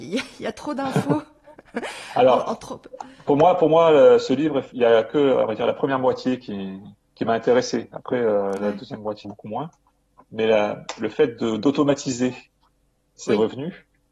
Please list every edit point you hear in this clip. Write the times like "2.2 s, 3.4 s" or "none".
9.2 s